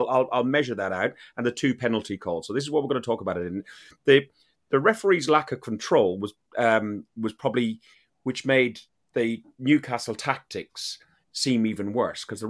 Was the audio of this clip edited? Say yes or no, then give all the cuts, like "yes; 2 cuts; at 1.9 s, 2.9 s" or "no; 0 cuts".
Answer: no; 0 cuts